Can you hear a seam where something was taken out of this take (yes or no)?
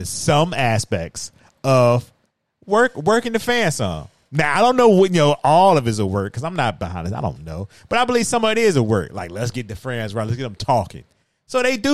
no